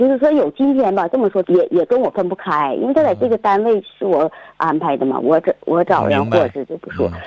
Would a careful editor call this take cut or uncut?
cut